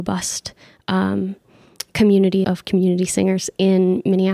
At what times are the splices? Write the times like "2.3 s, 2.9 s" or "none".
2.4 s